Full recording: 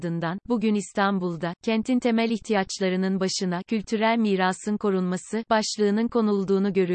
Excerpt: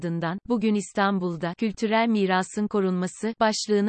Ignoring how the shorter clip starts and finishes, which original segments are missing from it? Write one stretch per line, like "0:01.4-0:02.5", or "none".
0:01.5-0:03.6